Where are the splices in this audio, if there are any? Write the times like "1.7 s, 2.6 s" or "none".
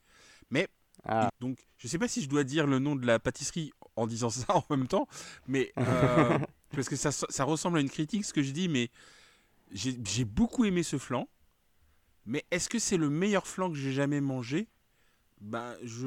1.3 s